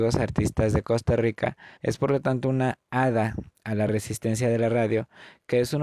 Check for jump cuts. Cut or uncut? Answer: cut